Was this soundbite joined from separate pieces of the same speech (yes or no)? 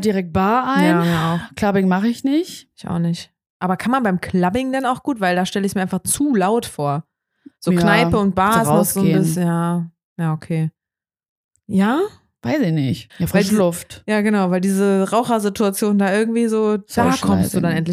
yes